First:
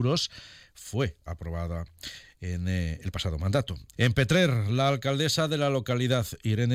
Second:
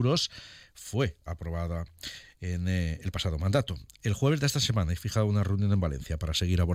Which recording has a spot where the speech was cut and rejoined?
first; 1 cut; at 3.9 s

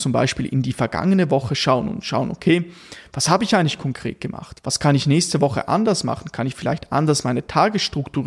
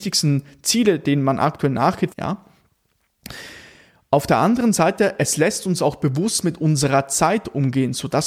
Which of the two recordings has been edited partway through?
second; 1 cut; at 2.1 s

